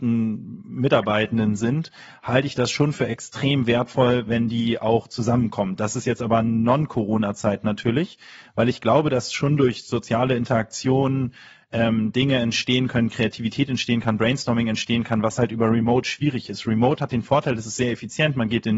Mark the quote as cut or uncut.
uncut